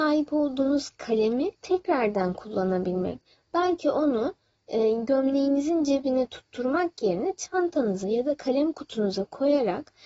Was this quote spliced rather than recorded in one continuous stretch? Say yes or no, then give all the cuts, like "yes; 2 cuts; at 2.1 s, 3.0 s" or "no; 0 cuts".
yes; 1 cut; at 1.5 s